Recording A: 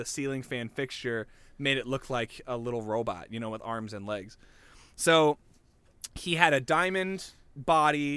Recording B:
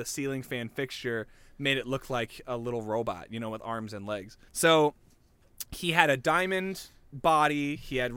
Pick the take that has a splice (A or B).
B